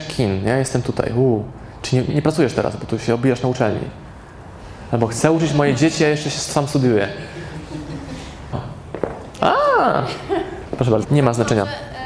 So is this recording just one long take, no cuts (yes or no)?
no